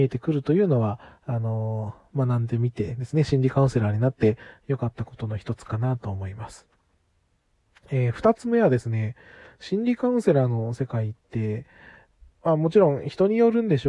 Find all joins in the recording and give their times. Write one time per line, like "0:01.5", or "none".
none